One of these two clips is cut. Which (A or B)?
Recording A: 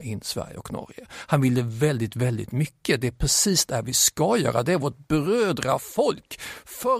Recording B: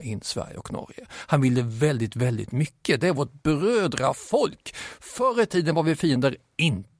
B